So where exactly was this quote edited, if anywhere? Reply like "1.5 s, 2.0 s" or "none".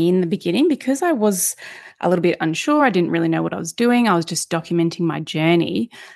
none